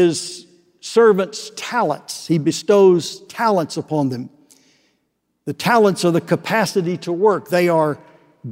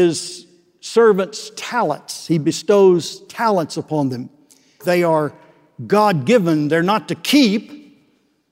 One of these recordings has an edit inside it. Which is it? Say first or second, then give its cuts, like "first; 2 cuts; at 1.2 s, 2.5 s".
second; 1 cut; at 4.8 s